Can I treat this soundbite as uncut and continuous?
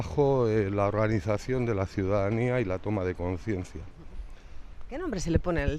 yes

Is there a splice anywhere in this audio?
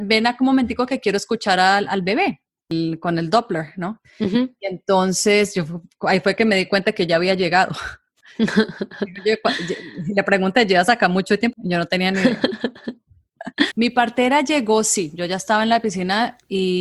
yes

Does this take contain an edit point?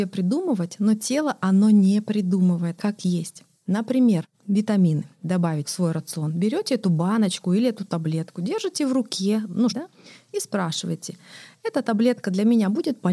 yes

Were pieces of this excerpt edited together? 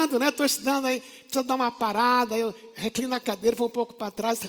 no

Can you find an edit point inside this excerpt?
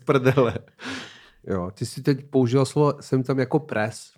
yes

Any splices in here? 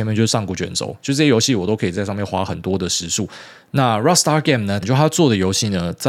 yes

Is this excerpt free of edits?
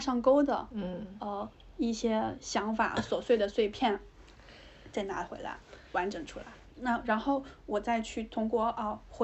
no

